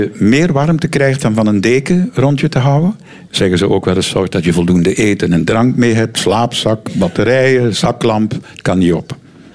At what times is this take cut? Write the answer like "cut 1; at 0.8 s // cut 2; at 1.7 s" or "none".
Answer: cut 1; at 3.3 s